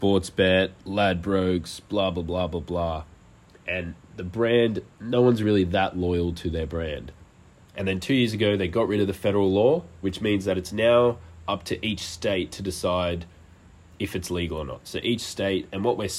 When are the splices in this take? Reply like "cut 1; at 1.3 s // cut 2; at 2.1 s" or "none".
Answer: cut 1; at 7.6 s